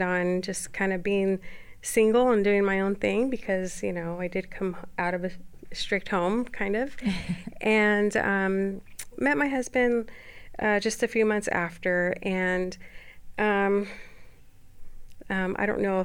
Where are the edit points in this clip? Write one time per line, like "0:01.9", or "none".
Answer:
0:09.1